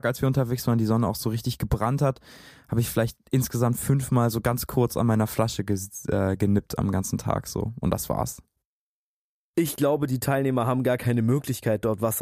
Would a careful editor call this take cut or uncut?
uncut